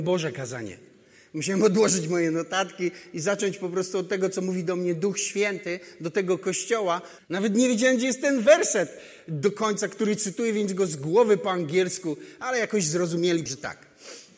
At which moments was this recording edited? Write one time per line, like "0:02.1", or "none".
0:07.2
0:13.5